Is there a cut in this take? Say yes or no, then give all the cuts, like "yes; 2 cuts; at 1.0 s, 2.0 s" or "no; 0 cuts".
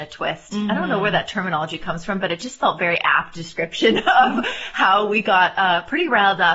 no; 0 cuts